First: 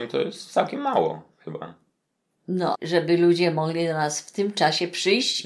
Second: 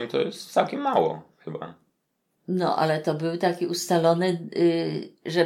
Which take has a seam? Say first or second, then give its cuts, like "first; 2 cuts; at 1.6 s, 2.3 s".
first; 1 cut; at 2.8 s